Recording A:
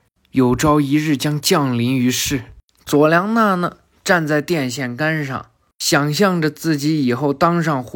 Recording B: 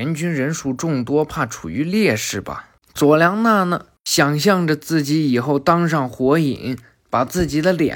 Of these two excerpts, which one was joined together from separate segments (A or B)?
B